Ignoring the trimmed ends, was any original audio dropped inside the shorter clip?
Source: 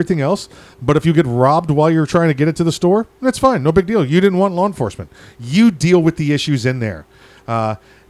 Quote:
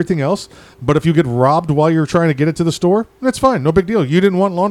no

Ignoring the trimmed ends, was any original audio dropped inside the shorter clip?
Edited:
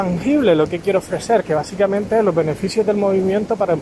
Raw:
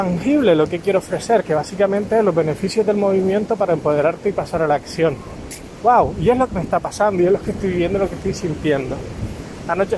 no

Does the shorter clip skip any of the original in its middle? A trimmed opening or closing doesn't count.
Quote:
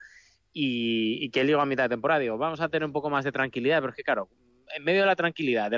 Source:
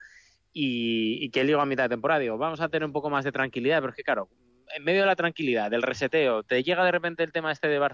no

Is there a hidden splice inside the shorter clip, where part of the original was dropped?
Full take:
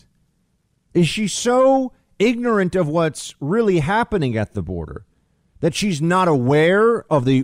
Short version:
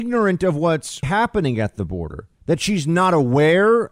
yes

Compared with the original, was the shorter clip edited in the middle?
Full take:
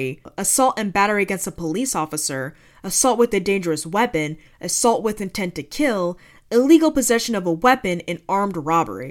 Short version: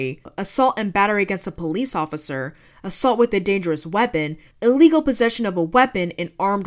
yes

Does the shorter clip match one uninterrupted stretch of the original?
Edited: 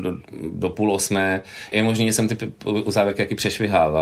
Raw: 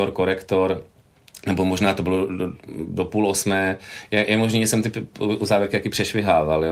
no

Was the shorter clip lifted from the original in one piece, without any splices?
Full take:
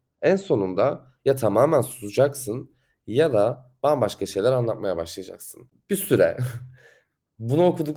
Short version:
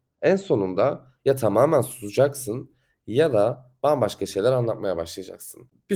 yes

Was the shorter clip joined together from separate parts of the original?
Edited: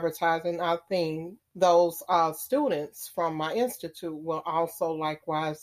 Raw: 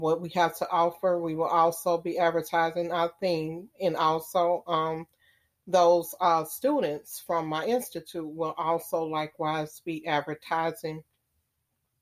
yes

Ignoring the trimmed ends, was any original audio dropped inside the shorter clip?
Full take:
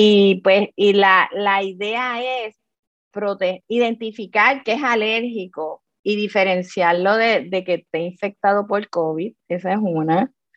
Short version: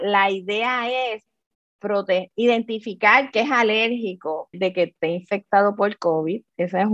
yes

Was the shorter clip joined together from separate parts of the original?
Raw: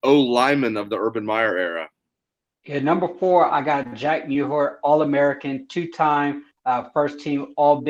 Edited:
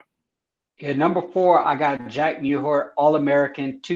no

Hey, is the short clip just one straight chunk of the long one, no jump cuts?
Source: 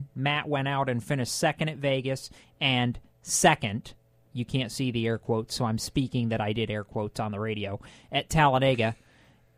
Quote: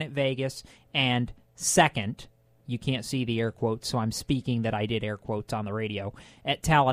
yes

